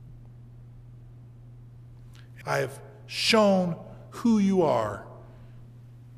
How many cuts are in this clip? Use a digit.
1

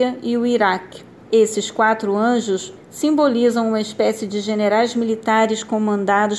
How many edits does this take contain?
2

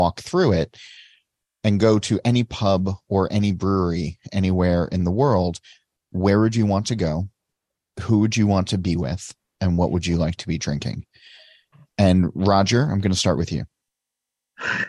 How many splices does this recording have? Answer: 0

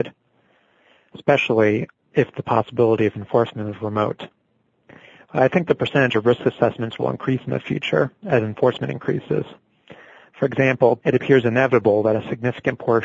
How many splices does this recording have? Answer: 1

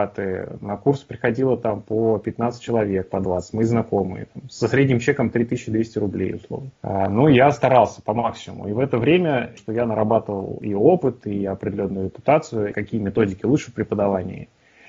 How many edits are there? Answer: 3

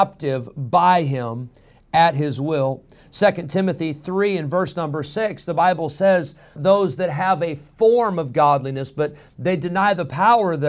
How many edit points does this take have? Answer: 1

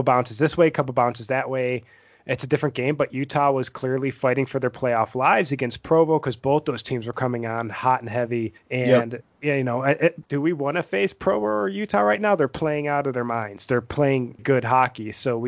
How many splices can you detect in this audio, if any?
2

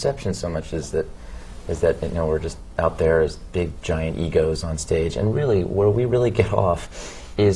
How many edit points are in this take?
0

